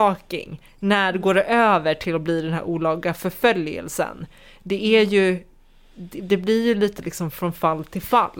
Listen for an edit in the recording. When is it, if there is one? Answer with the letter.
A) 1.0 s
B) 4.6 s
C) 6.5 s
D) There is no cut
D